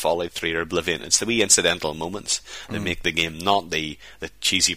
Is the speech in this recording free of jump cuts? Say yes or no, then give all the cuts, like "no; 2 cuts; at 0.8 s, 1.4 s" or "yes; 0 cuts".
yes; 0 cuts